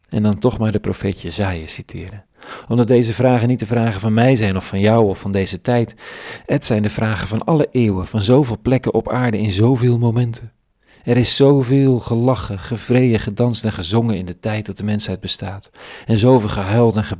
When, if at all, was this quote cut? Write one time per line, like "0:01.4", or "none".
none